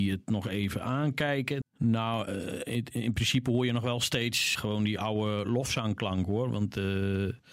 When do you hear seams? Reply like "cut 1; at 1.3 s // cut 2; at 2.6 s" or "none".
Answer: cut 1; at 1.6 s // cut 2; at 4.6 s